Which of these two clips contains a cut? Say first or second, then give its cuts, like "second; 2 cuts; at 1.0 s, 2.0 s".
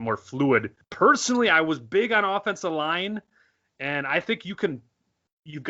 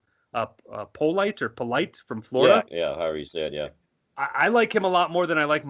second; 1 cut; at 2.7 s